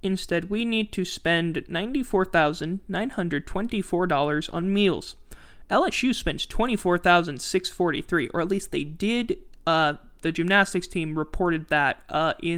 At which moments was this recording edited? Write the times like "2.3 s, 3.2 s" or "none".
none